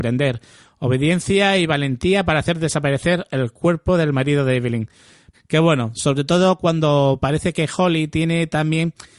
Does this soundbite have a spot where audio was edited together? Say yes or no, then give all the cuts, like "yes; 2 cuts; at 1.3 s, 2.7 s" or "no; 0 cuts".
yes; 1 cut; at 5.3 s